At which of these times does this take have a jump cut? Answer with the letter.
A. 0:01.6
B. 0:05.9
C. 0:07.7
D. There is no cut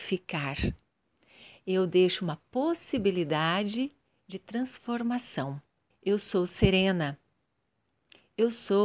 B